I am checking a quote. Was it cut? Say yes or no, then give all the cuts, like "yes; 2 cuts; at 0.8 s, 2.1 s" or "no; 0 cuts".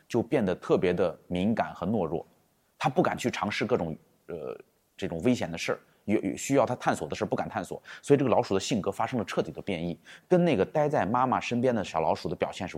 no; 0 cuts